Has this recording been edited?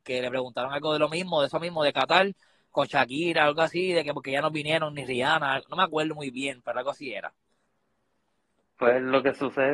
no; 0 cuts

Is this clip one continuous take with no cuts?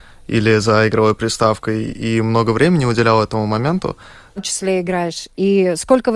no; 1 cut; at 4.4 s

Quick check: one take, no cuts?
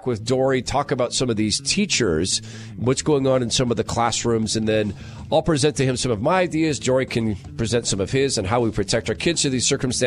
yes; 0 cuts

